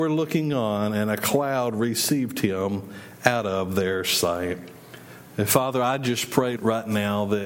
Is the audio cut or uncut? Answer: cut